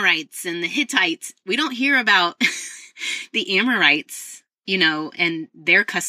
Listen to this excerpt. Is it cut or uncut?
uncut